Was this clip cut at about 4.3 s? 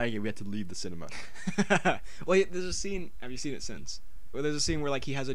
yes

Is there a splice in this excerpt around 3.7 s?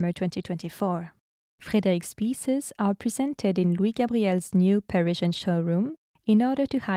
no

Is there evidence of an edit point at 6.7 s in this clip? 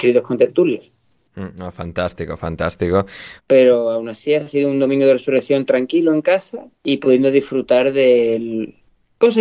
yes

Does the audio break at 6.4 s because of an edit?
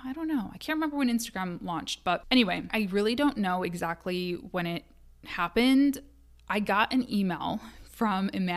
no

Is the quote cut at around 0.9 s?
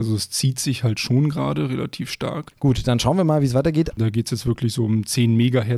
no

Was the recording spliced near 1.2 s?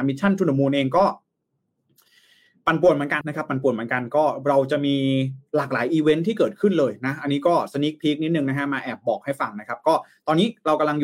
no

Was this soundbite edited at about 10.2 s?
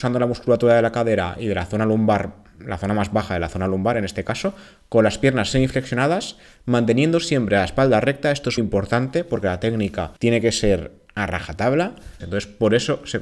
yes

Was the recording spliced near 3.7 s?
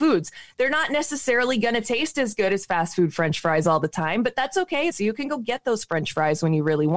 no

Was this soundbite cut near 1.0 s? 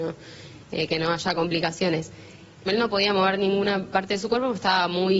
no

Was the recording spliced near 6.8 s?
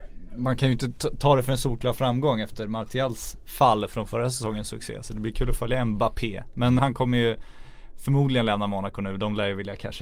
yes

